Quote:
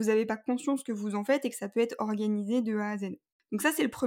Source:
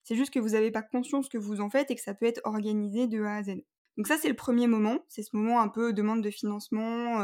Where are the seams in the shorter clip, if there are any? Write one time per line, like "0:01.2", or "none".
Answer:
none